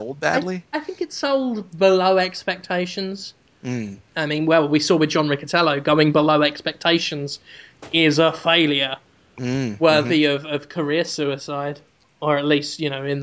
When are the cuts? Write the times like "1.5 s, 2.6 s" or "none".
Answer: 4.1 s

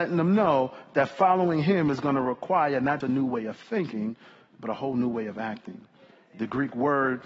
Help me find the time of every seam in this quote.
3.0 s

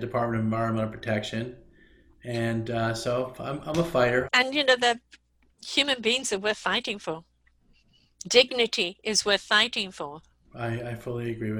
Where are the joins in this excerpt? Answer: 4.2 s, 10.4 s

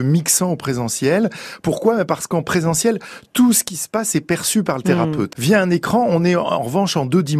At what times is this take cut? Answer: 5.3 s

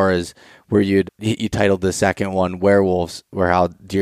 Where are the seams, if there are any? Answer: 1.1 s

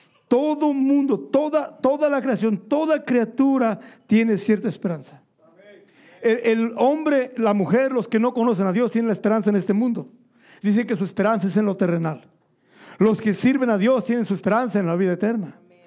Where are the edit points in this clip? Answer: none

